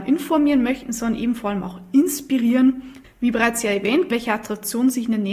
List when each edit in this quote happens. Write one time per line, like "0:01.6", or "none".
0:03.0
0:04.1